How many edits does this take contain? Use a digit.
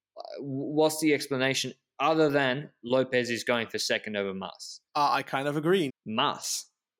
2